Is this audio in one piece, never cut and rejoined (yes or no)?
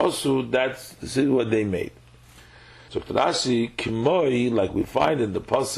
no